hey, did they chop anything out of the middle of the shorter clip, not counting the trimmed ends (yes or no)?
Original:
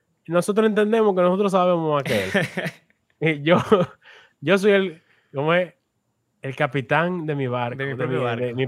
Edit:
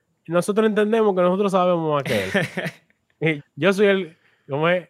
yes